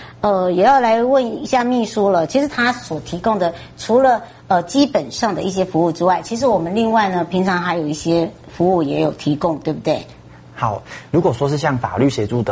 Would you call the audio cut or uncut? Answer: cut